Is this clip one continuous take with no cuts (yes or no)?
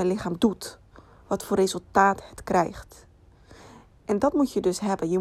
yes